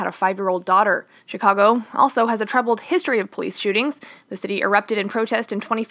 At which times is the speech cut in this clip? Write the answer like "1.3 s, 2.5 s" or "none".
1.2 s